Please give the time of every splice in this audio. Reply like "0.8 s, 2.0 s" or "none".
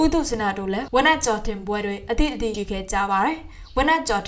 2.5 s